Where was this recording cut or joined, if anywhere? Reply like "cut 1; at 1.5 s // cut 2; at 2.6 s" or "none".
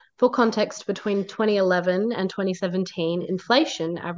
none